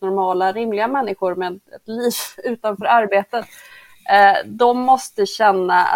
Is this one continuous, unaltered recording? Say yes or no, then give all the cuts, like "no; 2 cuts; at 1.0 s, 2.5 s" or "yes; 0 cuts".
yes; 0 cuts